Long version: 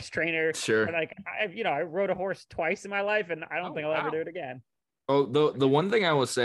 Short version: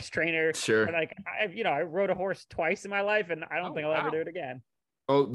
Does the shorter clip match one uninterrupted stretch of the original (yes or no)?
yes